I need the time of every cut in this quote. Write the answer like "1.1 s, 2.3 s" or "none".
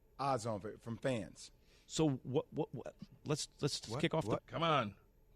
3.2 s, 4.4 s